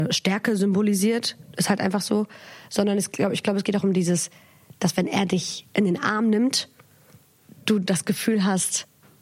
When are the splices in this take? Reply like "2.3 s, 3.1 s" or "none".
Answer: none